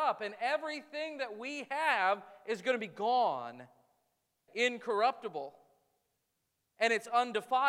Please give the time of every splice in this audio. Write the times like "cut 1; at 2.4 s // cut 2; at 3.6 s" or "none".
cut 1; at 4.5 s